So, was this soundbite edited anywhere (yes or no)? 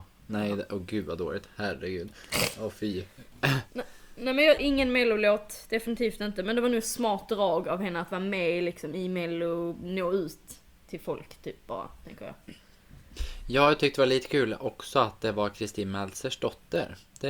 yes